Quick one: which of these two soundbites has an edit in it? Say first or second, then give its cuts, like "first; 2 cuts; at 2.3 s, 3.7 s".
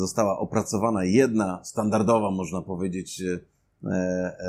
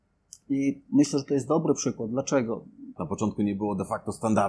second; 1 cut; at 3.0 s